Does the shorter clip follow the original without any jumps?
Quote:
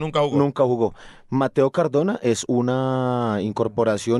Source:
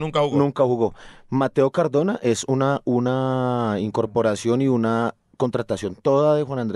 no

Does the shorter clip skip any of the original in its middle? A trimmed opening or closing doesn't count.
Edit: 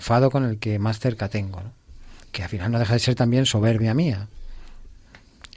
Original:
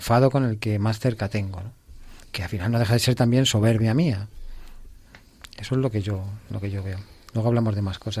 no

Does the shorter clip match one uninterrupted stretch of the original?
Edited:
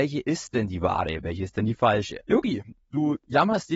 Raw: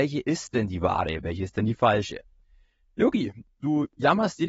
no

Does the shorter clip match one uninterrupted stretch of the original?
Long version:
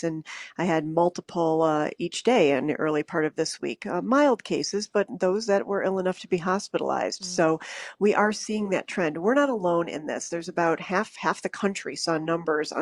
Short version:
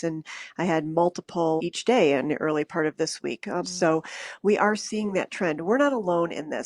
no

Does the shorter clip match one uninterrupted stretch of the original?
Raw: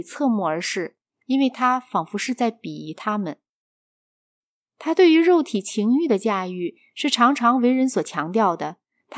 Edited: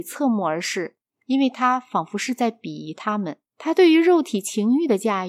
no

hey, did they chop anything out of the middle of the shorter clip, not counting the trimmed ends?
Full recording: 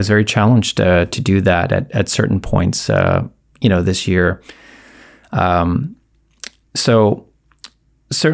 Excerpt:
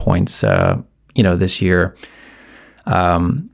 no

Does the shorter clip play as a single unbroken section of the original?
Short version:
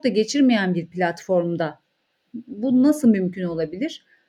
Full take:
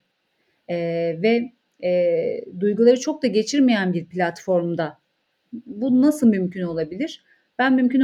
yes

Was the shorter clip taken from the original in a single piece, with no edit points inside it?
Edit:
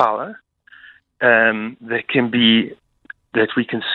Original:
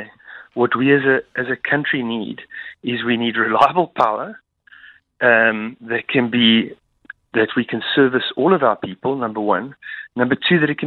yes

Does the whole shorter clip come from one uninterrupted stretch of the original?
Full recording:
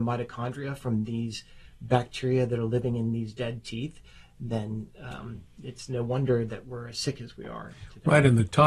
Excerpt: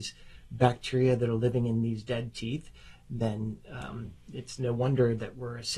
yes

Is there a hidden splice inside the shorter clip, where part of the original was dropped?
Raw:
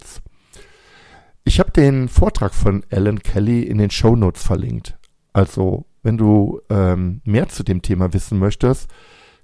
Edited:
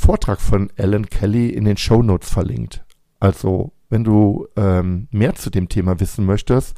no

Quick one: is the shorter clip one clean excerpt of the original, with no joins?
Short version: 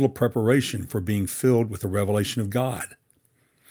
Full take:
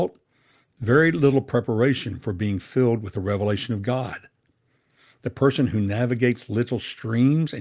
yes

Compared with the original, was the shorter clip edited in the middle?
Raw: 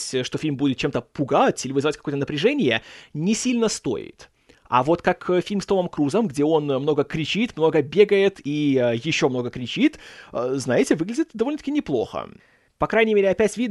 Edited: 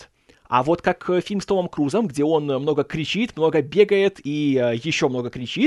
no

